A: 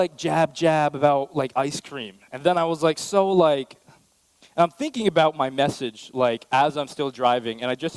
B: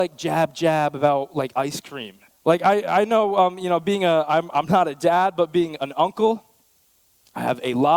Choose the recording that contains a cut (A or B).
B